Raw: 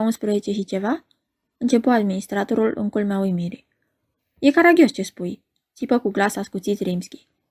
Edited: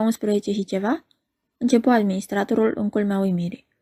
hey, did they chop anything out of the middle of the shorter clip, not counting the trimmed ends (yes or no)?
no